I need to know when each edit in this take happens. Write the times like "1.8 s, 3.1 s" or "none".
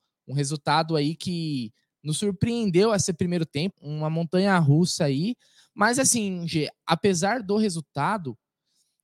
3.7 s